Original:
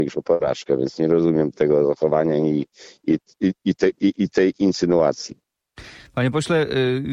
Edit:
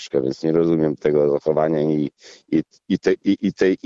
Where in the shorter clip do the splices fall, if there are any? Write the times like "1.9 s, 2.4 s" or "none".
2.8 s